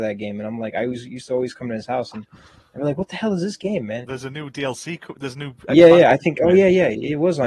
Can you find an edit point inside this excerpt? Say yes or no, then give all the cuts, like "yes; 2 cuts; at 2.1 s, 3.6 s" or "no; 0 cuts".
yes; 1 cut; at 4.0 s